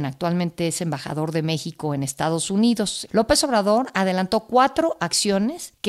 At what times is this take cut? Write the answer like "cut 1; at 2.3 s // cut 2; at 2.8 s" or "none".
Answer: cut 1; at 3.1 s